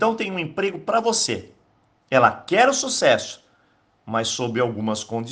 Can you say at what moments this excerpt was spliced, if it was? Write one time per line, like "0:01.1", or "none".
0:01.9

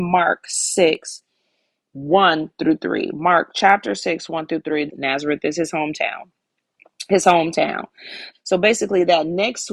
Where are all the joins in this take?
0:04.9
0:08.3

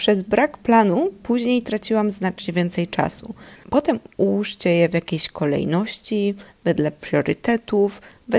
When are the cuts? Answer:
0:03.6

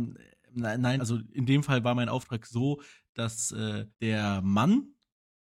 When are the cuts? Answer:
0:01.0
0:03.9

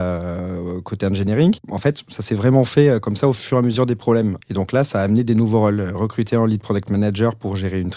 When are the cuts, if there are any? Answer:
0:04.4

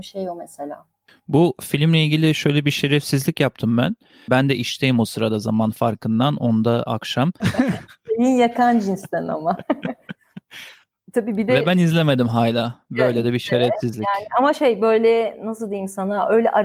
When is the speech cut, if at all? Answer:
0:04.3
0:07.4

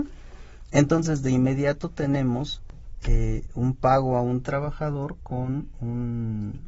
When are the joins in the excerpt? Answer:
none

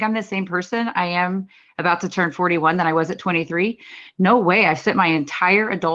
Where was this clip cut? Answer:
none

